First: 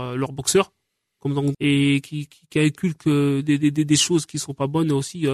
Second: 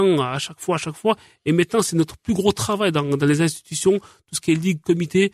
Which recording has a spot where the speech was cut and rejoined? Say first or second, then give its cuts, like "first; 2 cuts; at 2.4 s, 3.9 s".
first; 1 cut; at 1.5 s